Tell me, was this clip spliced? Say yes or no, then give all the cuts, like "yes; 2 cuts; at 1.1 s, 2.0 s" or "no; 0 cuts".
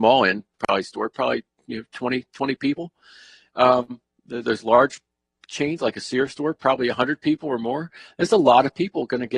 no; 0 cuts